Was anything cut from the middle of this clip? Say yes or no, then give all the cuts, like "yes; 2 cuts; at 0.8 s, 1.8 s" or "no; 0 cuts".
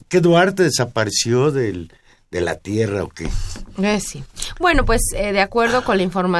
no; 0 cuts